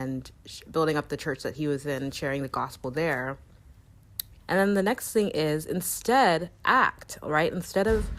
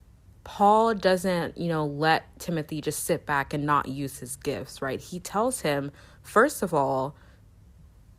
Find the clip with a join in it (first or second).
first